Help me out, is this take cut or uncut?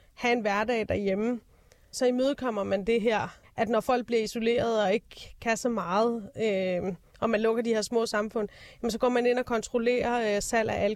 cut